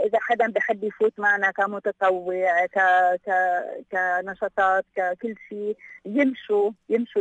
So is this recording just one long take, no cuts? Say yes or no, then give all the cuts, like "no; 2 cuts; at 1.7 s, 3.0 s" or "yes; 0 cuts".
yes; 0 cuts